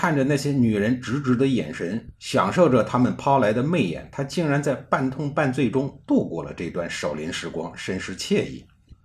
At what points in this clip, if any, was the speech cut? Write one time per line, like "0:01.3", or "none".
none